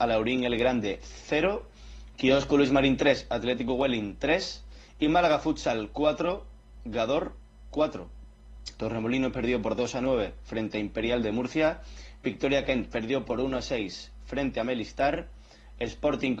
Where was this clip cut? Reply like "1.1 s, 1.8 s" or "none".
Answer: 8.8 s